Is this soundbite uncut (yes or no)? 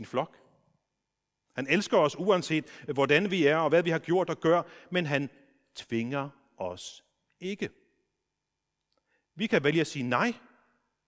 yes